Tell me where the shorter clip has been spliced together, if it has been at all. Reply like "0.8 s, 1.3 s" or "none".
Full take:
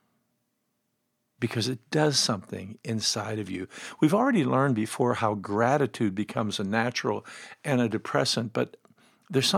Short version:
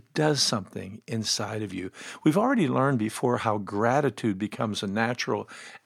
none